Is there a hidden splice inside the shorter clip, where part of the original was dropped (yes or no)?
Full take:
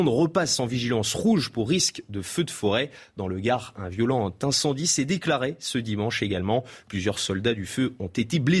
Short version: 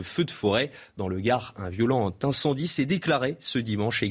no